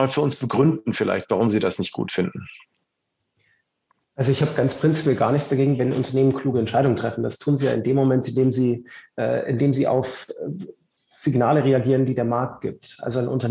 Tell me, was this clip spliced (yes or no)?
no